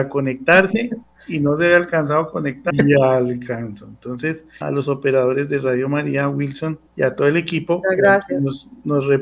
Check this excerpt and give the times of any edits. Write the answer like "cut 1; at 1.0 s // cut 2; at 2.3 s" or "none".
cut 1; at 2.7 s // cut 2; at 4.6 s // cut 3; at 6.9 s